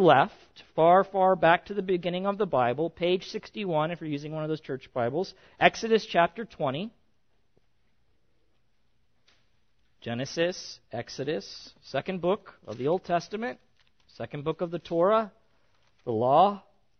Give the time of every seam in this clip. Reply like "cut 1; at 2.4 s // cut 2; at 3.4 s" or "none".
none